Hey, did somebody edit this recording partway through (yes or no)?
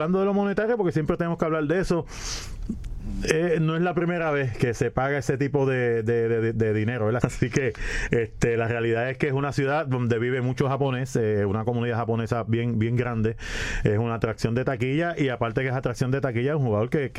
yes